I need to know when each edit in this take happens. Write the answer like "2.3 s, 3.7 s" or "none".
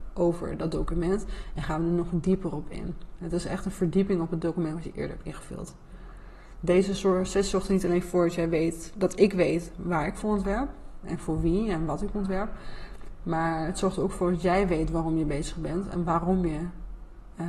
none